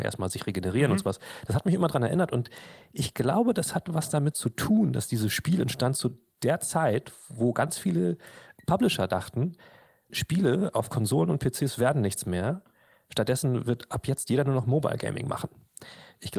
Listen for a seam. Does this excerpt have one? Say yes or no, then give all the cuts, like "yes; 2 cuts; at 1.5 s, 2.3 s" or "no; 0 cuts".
yes; 1 cut; at 10.1 s